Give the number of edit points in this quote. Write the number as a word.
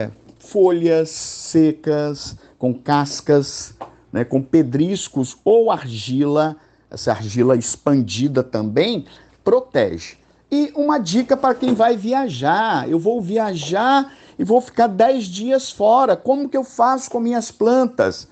zero